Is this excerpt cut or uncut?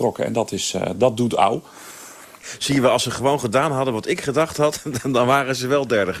uncut